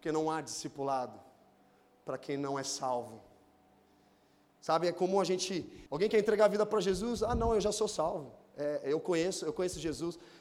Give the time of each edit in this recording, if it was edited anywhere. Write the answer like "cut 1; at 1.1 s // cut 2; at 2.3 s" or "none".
cut 1; at 5.9 s